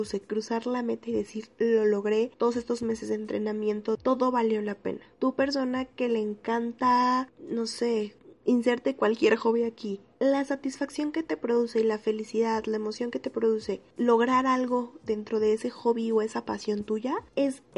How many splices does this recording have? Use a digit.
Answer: 0